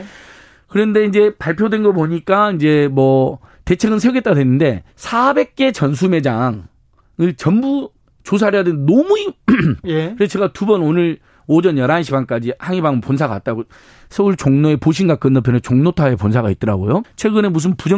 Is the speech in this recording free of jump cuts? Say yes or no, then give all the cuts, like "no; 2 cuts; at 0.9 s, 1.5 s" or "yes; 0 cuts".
no; 3 cuts; at 4.9 s, 9.8 s, 17.0 s